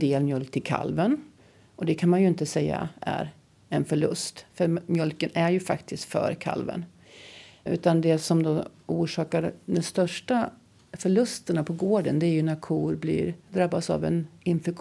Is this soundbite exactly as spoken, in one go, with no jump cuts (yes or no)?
no